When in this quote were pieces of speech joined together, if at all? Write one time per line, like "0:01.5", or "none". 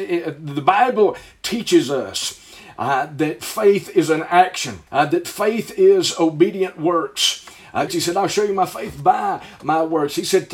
0:04.9
0:07.9